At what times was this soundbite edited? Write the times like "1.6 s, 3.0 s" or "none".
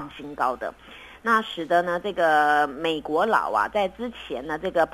1.2 s